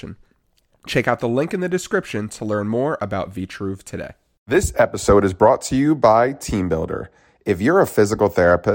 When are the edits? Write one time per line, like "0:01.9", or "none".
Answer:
none